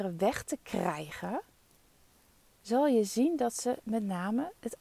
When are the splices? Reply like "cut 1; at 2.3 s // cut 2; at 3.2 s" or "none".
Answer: none